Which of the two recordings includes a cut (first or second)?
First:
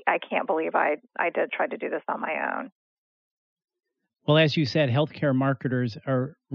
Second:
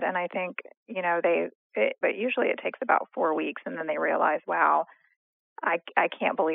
second